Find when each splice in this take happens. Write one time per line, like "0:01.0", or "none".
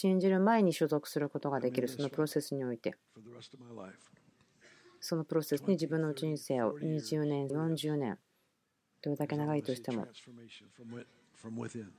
0:07.5